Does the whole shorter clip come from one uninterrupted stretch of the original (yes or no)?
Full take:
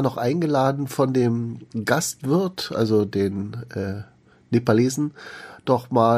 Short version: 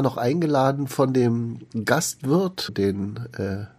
no